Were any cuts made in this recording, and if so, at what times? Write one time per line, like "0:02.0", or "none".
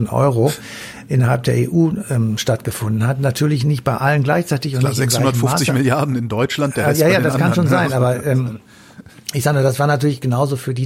none